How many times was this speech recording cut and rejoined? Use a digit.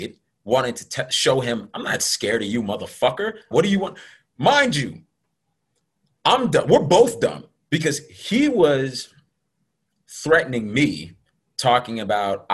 1